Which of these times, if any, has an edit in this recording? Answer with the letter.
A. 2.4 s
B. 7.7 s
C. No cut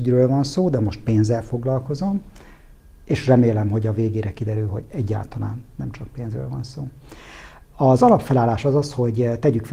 C